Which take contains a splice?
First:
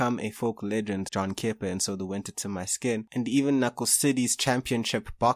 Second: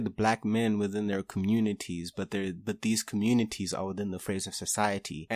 first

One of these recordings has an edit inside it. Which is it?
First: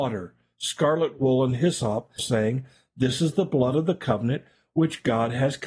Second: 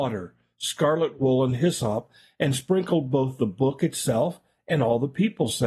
first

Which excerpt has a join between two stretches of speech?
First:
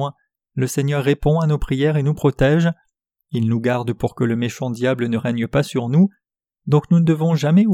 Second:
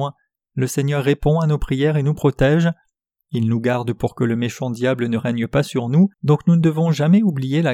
second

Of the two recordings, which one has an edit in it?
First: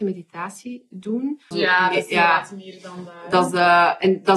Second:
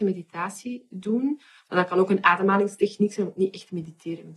first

